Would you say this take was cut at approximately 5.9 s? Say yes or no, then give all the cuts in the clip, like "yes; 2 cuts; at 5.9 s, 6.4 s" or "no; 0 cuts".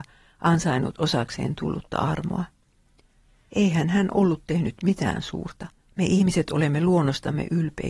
yes; 1 cut; at 5.9 s